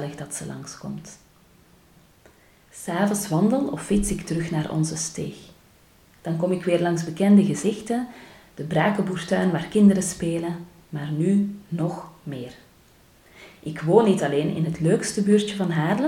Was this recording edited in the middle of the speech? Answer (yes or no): yes